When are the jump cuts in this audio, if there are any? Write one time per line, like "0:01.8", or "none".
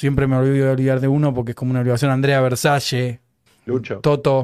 0:03.5